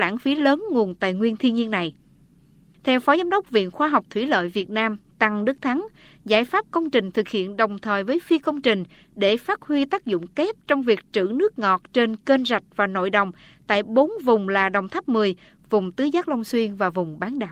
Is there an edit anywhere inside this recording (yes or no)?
yes